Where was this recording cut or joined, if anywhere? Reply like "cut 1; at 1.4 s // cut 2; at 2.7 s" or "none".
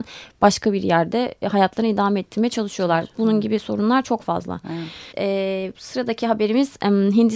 cut 1; at 5.1 s